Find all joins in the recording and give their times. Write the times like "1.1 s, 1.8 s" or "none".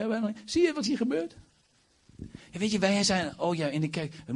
none